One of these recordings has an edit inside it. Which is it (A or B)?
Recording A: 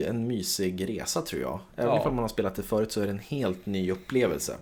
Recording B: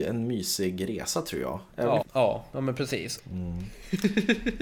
B